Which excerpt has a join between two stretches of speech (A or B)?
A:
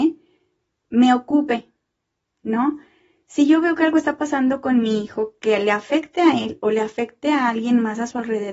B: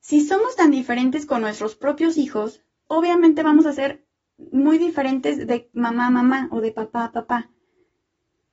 B